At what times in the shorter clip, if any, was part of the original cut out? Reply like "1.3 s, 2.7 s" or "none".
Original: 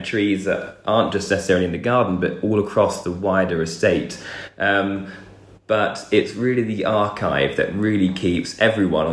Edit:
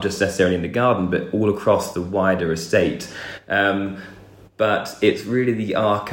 none